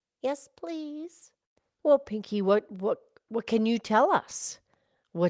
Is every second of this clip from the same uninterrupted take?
yes; 0 cuts

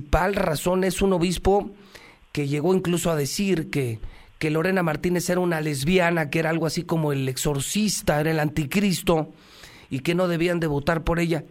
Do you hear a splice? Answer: no; 0 cuts

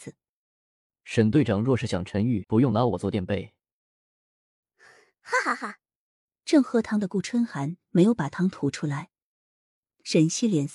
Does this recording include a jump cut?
yes; 1 cut; at 2.4 s

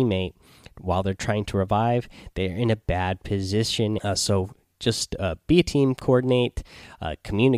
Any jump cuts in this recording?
yes; 1 cut; at 4.0 s

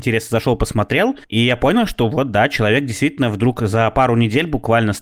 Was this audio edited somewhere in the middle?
yes; 1 cut; at 1.2 s

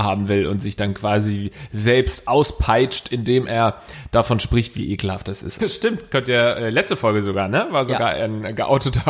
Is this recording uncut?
no; 1 cut; at 5.6 s

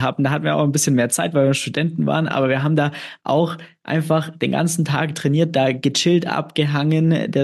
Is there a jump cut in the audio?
no; 0 cuts

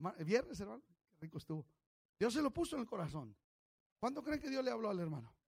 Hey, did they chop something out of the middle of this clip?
no; 0 cuts

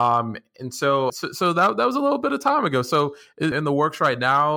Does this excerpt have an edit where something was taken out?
yes; 2 cuts; at 1.1 s, 3.5 s

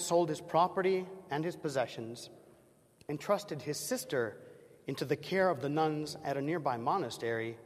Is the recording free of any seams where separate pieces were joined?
no; 1 cut; at 3.1 s

